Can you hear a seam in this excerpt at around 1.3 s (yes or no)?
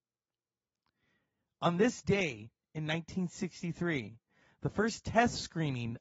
no